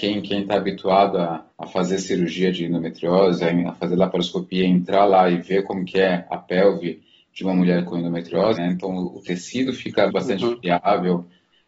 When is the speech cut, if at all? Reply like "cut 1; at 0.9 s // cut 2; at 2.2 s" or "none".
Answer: cut 1; at 1.5 s // cut 2; at 8.5 s // cut 3; at 10.1 s